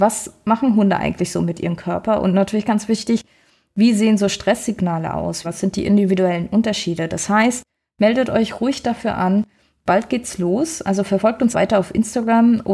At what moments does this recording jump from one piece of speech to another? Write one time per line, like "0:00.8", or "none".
0:05.4
0:11.5